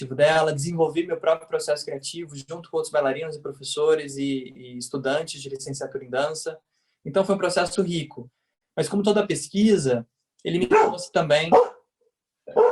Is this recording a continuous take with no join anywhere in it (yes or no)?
no